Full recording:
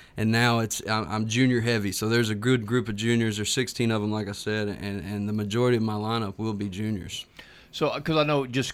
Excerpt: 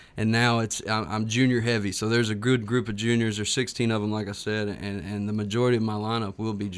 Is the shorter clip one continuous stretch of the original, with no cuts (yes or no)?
yes